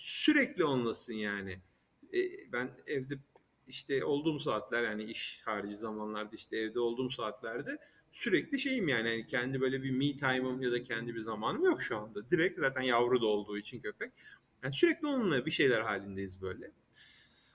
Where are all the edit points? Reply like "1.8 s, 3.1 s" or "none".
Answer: none